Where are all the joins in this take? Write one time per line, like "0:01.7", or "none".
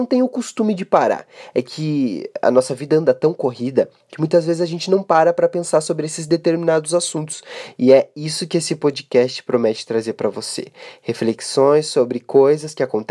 none